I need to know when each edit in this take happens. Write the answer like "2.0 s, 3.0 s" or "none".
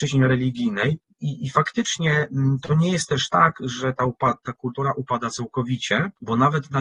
1.2 s